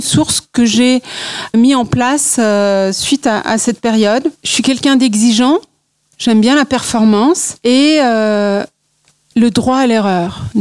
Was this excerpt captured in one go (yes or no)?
yes